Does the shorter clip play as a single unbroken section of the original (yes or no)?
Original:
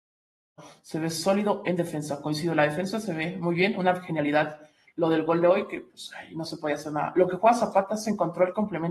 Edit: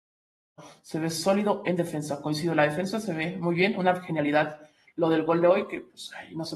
yes